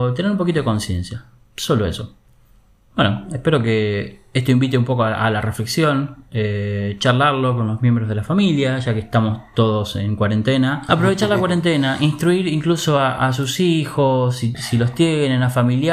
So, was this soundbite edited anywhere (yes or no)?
yes